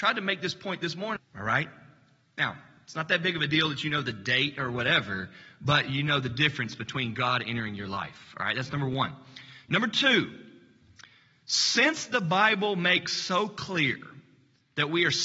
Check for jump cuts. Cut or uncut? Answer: cut